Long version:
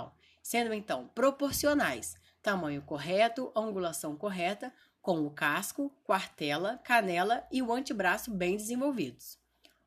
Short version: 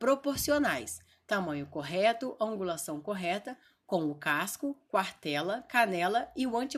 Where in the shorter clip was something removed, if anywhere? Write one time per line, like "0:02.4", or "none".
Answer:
none